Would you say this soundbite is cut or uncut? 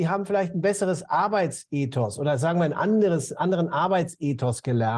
uncut